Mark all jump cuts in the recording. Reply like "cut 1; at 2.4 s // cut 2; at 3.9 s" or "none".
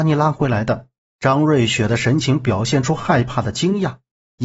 cut 1; at 1.1 s